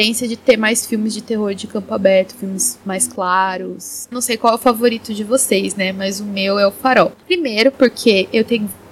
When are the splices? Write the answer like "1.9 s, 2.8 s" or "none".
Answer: 4.1 s